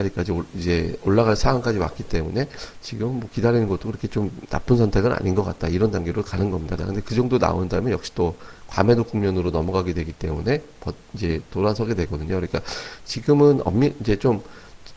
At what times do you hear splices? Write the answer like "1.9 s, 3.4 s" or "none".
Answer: 6.8 s